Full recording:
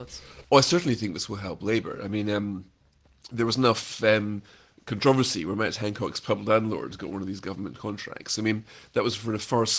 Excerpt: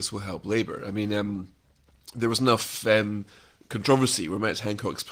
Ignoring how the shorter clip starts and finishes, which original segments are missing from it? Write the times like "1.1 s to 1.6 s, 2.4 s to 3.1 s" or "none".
none